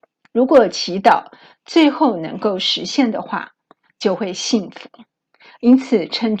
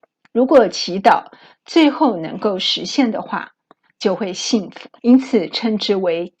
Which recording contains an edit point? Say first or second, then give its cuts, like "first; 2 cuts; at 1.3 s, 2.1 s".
second; 1 cut; at 5.0 s